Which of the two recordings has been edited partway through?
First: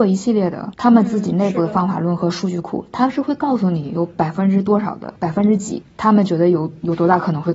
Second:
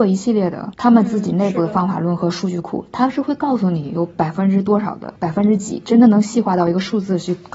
first; 1 cut; at 5.8 s

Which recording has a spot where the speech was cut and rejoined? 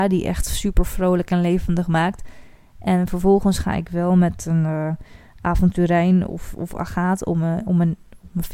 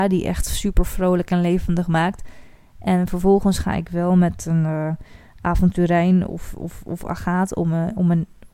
first; 1 cut; at 6.5 s

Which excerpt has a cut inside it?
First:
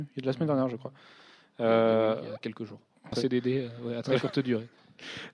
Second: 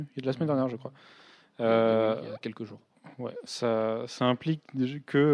first; 1 cut; at 3.1 s

